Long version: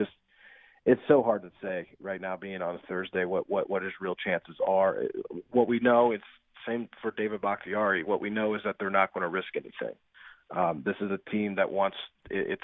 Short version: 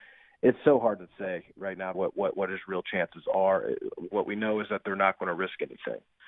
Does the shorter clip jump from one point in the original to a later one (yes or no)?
yes